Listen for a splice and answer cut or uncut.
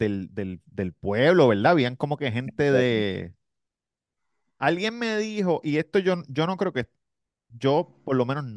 uncut